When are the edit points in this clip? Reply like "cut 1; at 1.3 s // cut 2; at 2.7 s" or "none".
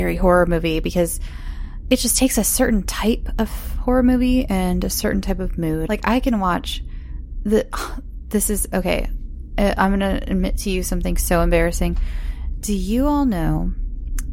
cut 1; at 5.9 s